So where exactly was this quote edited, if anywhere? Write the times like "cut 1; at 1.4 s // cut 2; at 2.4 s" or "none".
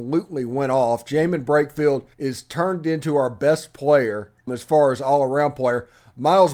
cut 1; at 2.1 s // cut 2; at 4.5 s